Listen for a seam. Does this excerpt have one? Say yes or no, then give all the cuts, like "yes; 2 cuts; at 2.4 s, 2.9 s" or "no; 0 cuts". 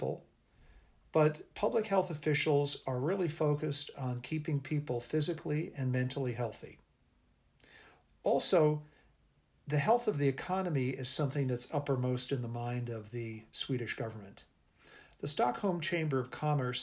no; 0 cuts